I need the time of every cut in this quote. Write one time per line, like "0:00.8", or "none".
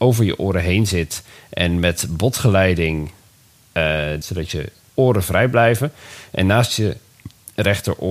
0:04.2